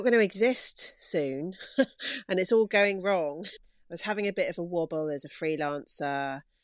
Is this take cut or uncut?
cut